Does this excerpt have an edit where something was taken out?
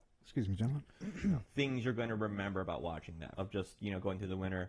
yes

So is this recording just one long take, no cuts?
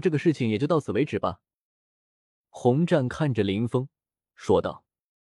yes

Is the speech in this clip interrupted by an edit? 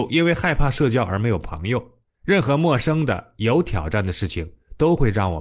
yes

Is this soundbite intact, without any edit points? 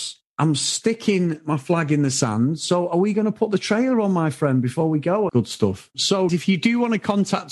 no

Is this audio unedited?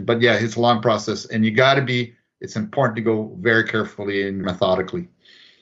no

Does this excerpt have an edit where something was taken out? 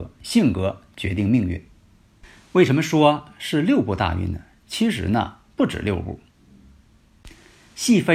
no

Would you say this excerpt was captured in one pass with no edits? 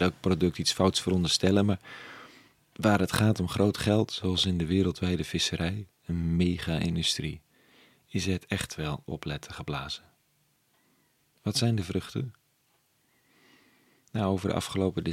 yes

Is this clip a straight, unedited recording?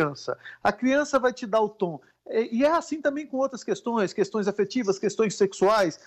yes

